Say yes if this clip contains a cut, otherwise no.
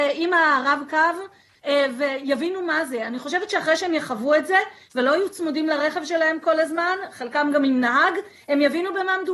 no